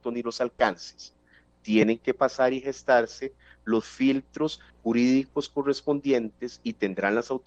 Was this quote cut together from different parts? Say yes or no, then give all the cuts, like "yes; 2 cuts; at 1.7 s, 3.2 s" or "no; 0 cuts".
yes; 1 cut; at 4.7 s